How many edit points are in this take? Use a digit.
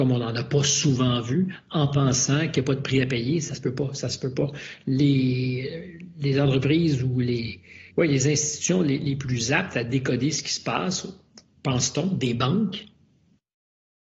1